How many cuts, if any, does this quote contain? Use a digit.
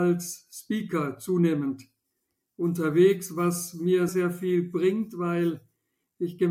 1